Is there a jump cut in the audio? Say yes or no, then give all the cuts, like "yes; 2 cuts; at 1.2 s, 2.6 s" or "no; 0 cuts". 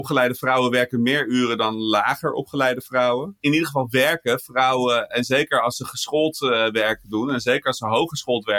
no; 0 cuts